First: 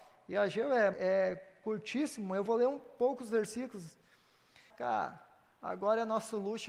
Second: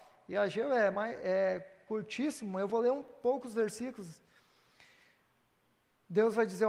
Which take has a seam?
first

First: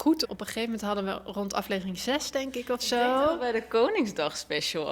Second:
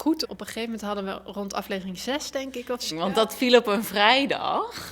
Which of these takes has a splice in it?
second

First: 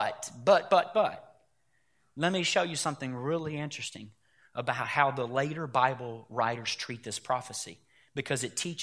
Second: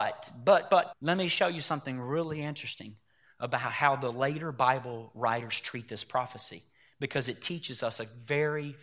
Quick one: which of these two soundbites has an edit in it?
second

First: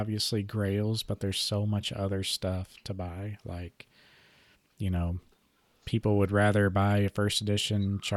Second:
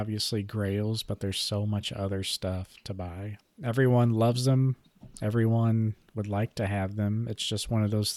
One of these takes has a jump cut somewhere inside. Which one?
second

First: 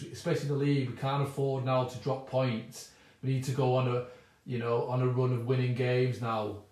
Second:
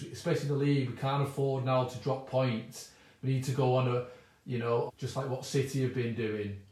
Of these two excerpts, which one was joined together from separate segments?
second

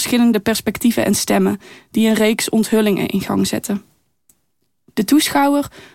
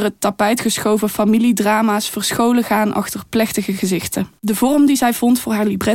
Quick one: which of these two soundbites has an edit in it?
second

